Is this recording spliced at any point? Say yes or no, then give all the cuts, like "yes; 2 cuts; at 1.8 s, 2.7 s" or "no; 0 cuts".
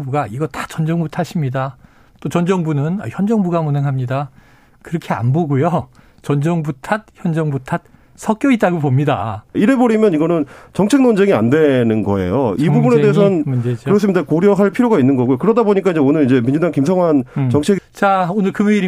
yes; 2 cuts; at 9.5 s, 17.8 s